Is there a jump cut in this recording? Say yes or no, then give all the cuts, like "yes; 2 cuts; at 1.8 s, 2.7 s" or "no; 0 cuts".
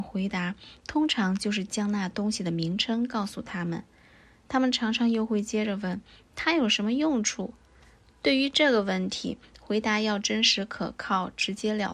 no; 0 cuts